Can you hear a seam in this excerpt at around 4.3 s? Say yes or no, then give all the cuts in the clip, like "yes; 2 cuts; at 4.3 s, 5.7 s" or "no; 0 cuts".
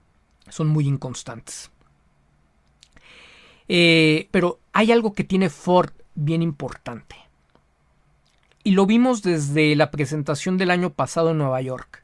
yes; 1 cut; at 4.3 s